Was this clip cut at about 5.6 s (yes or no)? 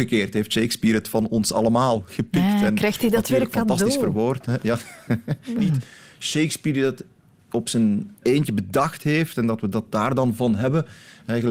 yes